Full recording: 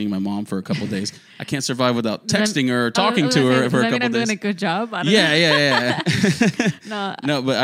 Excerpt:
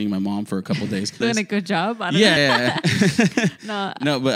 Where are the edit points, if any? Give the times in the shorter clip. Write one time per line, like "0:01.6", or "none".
0:01.2
0:02.4